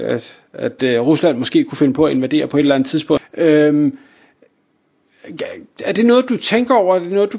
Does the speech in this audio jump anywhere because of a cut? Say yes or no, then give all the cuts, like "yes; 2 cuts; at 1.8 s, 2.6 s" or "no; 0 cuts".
yes; 1 cut; at 3.2 s